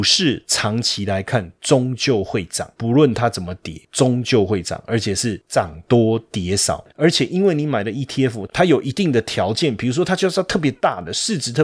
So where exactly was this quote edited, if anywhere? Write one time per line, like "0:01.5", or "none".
0:06.9
0:08.5

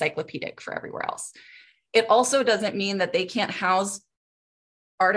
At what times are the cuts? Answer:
none

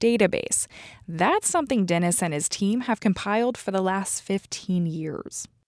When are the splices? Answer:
none

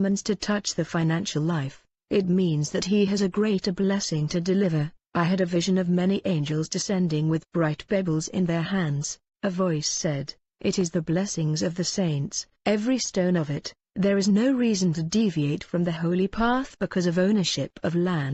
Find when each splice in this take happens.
none

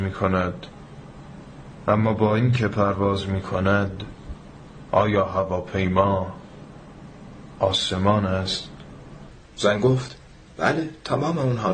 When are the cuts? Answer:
0:09.5

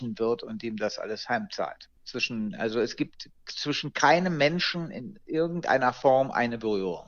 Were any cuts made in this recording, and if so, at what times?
0:02.0

